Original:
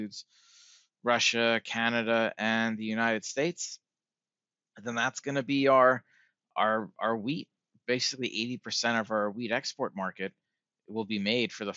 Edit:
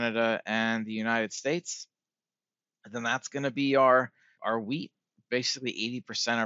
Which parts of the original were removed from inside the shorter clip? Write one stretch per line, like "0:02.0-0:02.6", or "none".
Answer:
0:06.3-0:06.9